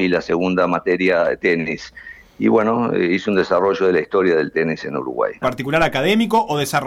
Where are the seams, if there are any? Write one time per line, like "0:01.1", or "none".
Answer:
0:05.4